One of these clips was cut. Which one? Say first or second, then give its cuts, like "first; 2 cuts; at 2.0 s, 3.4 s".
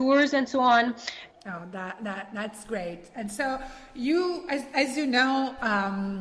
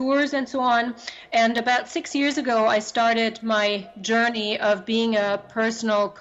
first; 1 cut; at 1.3 s